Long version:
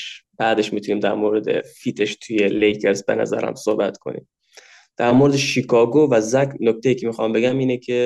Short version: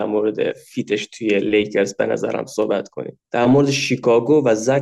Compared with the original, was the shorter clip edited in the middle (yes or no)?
yes